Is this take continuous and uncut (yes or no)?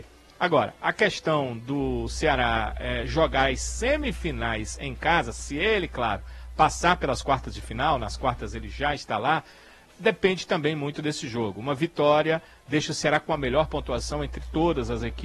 yes